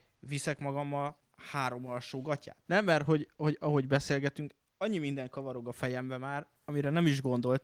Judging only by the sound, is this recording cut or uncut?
cut